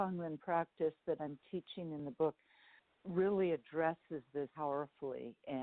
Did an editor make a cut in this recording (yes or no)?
yes